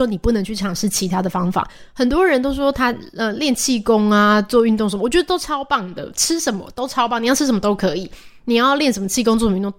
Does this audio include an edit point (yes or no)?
no